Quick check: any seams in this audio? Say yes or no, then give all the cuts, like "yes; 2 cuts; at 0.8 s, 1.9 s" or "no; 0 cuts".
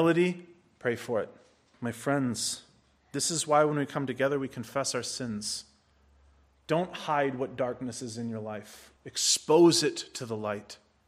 yes; 2 cuts; at 1.7 s, 9.0 s